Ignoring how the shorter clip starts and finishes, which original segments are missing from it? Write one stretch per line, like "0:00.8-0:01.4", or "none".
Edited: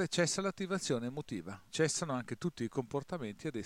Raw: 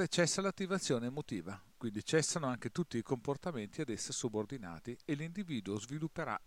0:01.7-0:02.0